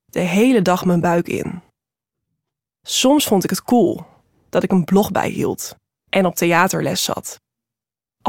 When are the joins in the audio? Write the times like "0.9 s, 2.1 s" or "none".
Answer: none

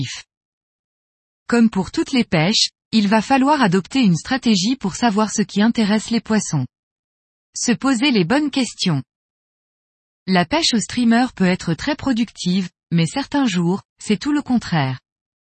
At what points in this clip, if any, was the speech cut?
none

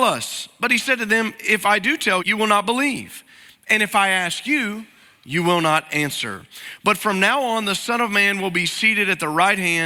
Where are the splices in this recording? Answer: 2.2 s

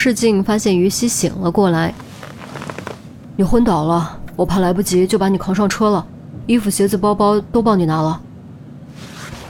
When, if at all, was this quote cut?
none

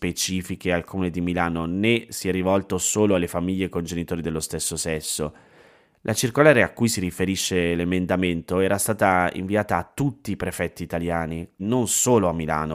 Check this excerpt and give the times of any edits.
11.6 s

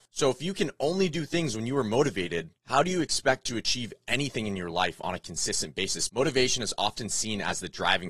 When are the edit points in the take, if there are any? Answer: 6.1 s

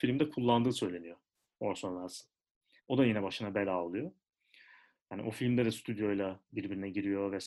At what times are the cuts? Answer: 2.8 s

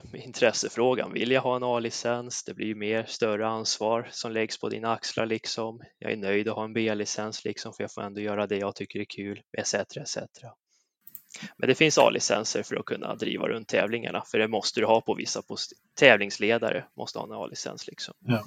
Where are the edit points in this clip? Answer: none

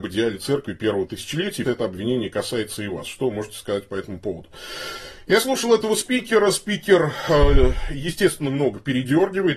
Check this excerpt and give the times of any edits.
1.6 s, 8.5 s

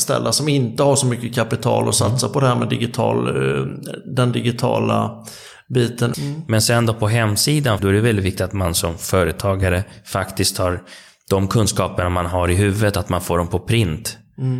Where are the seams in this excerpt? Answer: 6.1 s, 7.8 s

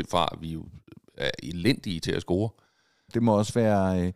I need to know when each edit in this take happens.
3.1 s

